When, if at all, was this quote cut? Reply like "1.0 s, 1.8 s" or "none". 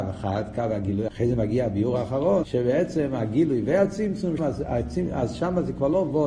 1.1 s, 2.4 s, 4.4 s